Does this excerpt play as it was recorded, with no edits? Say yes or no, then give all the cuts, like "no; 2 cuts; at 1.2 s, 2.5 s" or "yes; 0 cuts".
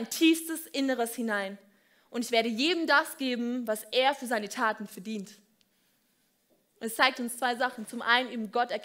yes; 0 cuts